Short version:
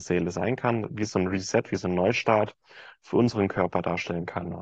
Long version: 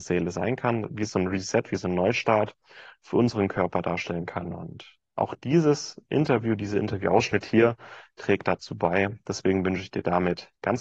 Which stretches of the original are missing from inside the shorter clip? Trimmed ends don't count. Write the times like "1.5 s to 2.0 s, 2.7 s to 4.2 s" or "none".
none